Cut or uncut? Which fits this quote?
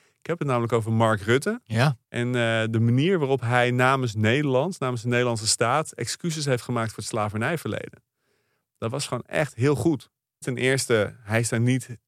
cut